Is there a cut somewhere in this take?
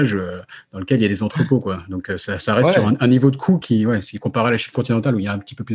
no; 0 cuts

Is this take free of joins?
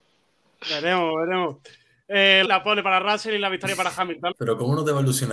no; 2 cuts; at 2.5 s, 4.3 s

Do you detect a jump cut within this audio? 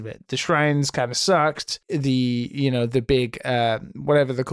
no; 0 cuts

